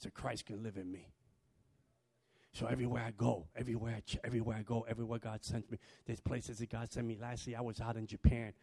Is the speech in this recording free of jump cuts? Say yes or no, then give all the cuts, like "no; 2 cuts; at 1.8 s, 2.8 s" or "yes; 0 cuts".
yes; 0 cuts